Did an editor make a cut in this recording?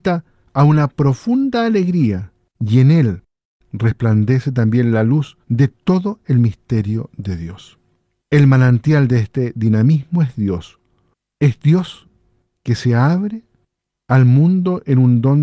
yes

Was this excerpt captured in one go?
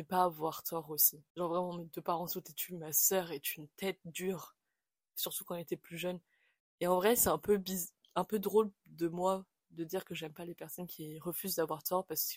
no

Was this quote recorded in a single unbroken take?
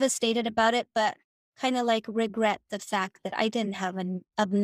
yes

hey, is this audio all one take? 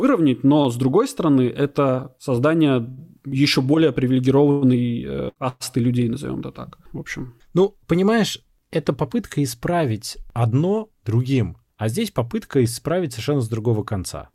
no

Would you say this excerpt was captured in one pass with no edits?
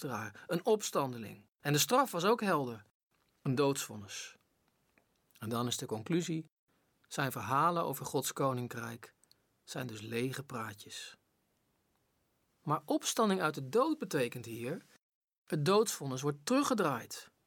yes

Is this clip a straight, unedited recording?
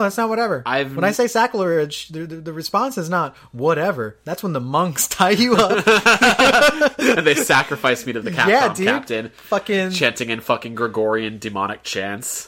yes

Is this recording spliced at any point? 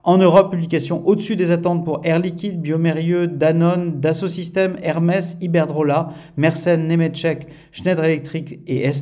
no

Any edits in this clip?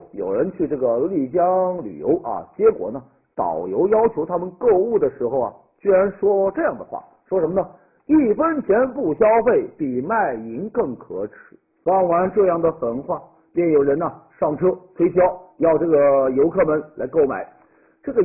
no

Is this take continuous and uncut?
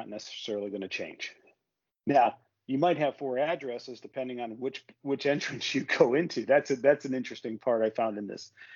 yes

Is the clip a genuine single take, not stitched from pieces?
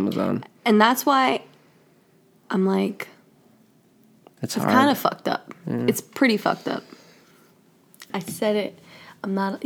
no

